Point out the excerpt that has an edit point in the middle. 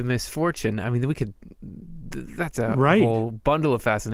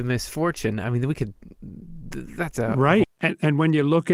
second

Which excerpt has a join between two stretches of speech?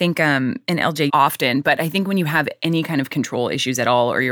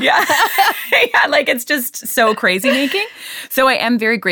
first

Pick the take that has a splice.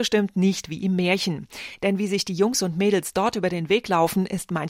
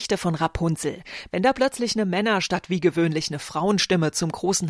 second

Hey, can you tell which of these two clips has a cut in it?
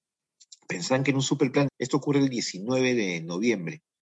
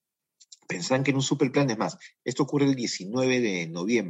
first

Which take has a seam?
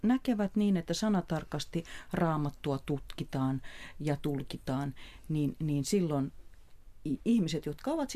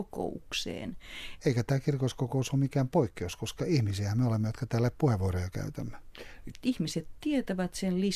second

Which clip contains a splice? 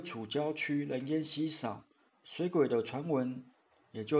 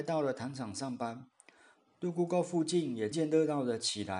second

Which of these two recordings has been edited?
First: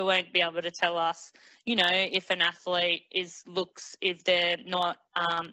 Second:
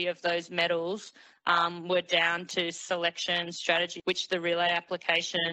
second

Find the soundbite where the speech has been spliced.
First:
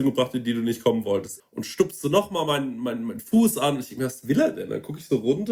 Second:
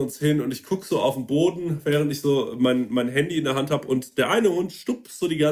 first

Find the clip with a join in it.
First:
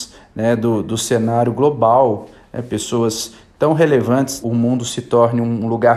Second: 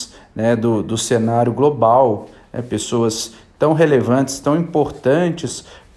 first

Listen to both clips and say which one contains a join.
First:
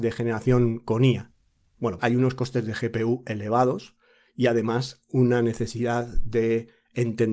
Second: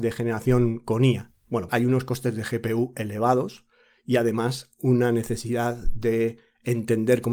second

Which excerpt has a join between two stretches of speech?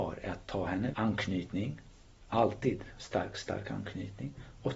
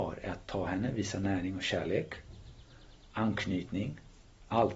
first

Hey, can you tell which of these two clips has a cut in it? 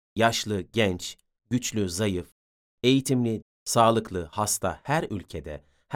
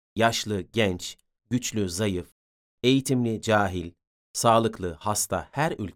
first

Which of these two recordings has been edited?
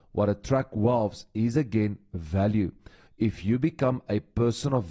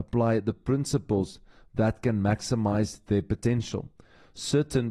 first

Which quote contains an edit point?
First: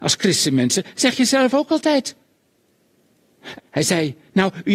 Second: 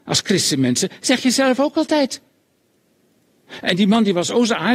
first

